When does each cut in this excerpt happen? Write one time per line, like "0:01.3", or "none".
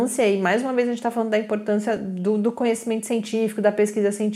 none

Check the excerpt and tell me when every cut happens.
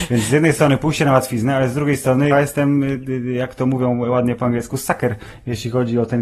0:02.3

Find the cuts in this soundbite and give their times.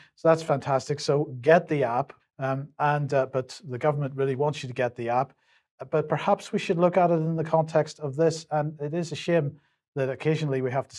0:02.2

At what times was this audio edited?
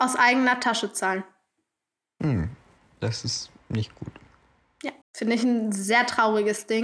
0:05.0

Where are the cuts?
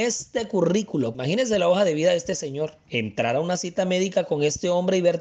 0:01.1
0:02.9

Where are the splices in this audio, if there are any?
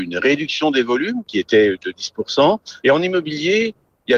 0:02.8

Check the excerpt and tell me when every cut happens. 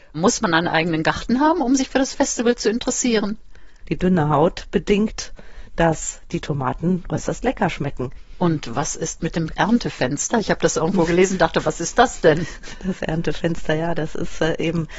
0:03.8

